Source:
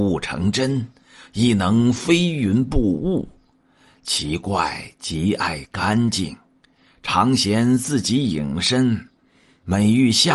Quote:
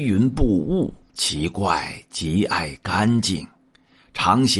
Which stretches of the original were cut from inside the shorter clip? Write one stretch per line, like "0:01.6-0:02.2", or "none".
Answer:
0:03.4-0:04.0